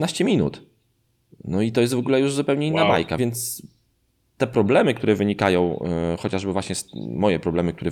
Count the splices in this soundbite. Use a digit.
1